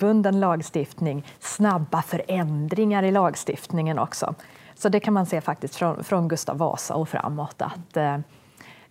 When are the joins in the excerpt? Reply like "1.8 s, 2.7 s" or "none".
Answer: none

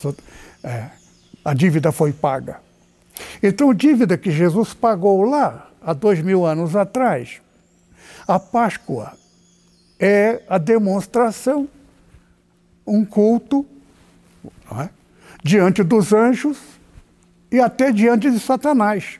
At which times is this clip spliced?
none

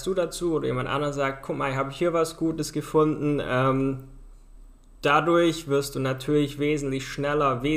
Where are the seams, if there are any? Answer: none

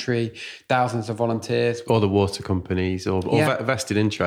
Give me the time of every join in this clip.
1.8 s

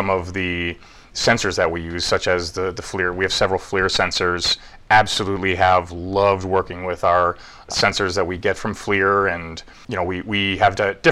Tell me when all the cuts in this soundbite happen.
none

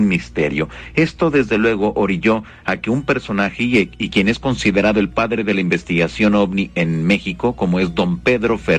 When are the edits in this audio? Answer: none

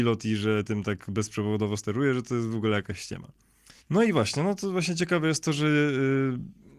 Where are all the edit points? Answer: 3.8 s

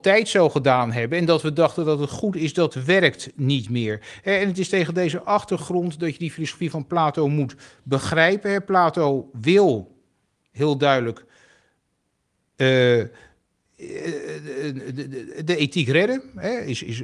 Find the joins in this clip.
none

